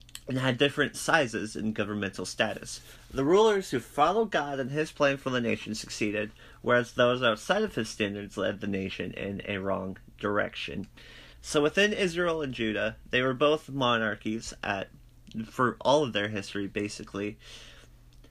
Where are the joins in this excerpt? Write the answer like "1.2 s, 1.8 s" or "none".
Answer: 11.3 s